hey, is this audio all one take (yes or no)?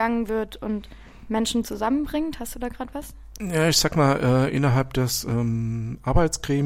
yes